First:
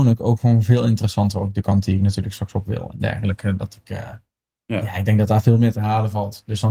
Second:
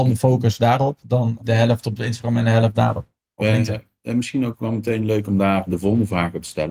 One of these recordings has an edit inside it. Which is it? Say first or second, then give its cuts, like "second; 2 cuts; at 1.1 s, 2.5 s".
second; 2 cuts; at 1.4 s, 5.7 s